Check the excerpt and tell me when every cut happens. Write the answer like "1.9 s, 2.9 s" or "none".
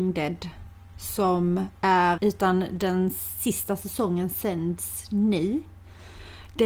2.2 s